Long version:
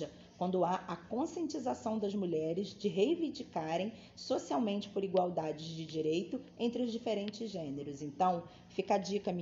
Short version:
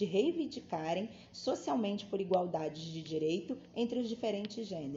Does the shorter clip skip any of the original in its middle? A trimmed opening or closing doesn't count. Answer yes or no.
no